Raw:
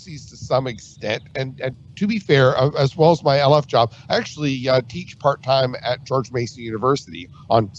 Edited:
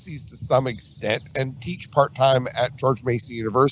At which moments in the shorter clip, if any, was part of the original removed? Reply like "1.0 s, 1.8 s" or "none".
1.6 s